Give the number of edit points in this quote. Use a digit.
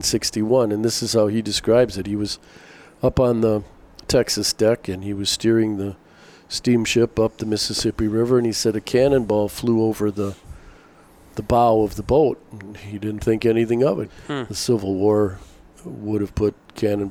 2